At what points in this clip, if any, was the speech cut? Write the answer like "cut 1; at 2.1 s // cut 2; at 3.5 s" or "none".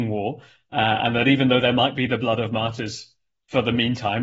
none